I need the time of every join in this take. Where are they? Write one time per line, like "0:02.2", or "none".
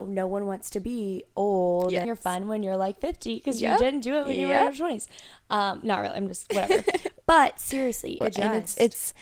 0:02.0
0:08.2